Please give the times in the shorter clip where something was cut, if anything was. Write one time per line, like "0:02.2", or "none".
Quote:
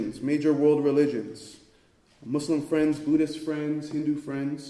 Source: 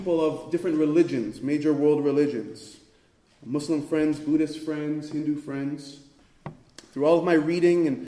none